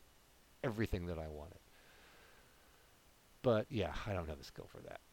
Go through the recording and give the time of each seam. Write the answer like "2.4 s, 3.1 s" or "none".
none